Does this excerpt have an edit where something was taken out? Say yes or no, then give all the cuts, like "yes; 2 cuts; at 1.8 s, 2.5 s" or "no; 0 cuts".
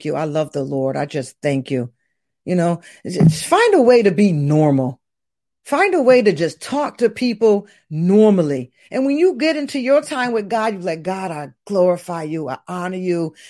no; 0 cuts